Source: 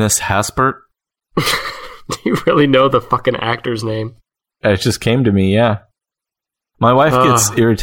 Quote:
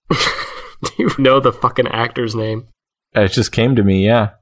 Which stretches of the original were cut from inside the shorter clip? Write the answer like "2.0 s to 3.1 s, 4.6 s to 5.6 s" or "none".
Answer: 2.4 s to 2.7 s

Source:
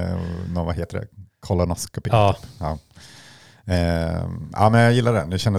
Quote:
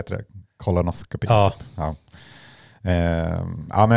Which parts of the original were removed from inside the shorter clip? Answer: none

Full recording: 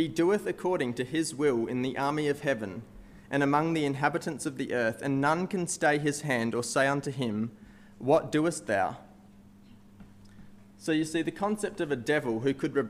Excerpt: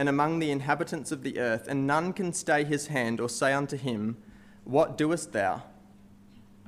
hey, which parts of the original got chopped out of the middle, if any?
none

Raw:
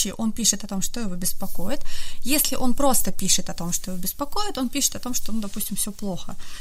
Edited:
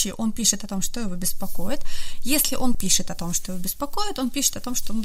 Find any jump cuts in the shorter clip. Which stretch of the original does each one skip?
2.7 s to 3.1 s

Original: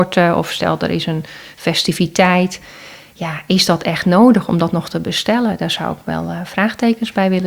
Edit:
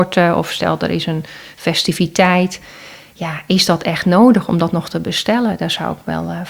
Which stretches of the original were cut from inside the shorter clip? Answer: none

